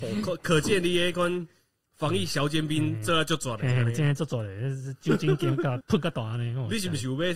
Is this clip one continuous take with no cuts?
yes; 0 cuts

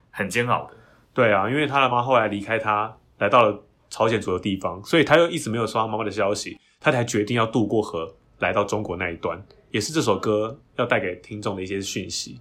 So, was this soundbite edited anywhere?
yes; 1 cut; at 1.9 s

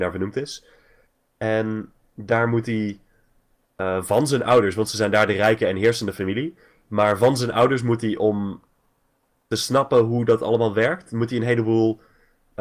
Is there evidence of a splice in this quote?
no; 0 cuts

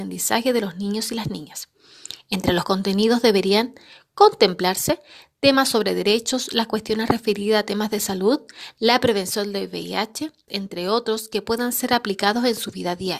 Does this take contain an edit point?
yes; 1 cut; at 10.5 s

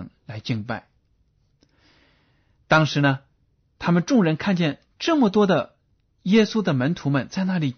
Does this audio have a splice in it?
no; 0 cuts

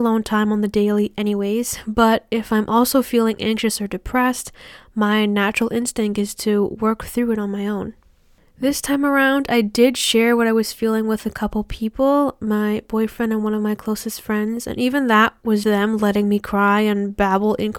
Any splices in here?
yes; 1 cut; at 15.6 s

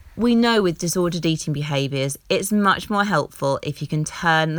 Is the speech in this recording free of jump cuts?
yes; 0 cuts

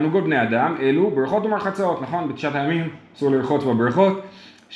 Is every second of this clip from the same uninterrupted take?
yes; 0 cuts

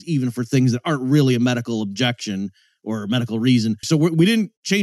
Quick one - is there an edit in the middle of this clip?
yes; 1 cut; at 3.8 s

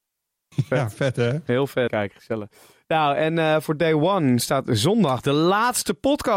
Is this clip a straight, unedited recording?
no; 1 cut; at 1.9 s

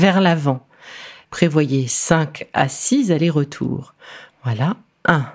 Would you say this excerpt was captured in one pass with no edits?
no; 2 cuts; at 1.2 s, 4.3 s

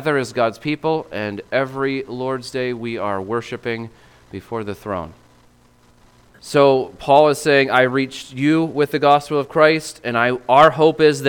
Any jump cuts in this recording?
yes; 1 cut; at 6.4 s

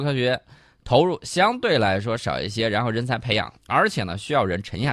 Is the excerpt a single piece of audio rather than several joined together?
no; 1 cut; at 3.6 s

